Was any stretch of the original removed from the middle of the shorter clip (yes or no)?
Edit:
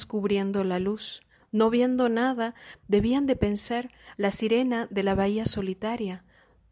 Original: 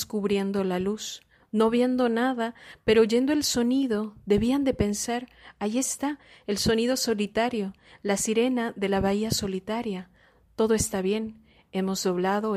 yes